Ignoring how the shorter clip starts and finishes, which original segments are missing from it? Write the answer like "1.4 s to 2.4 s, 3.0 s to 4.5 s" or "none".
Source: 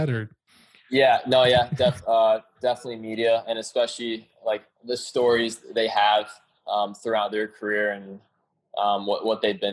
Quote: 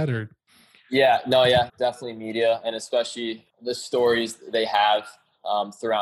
1.7 s to 2.5 s, 4.3 s to 4.7 s